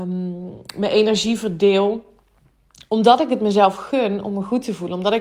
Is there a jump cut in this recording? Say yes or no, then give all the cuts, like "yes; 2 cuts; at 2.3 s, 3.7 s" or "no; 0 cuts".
no; 0 cuts